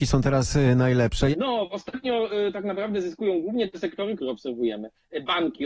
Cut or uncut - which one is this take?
cut